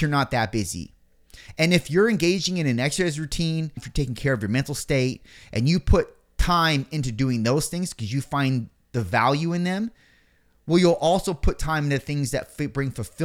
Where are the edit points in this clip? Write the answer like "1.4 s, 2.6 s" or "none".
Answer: 3.8 s